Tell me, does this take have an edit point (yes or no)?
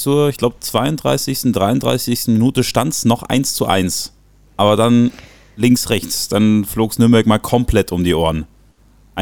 no